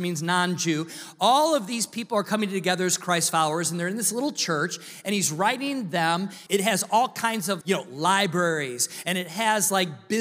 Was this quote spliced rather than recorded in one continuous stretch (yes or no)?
yes